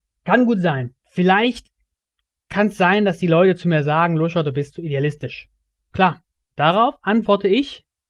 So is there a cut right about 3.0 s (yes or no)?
no